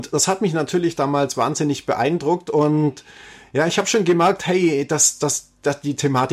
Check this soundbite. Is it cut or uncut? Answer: uncut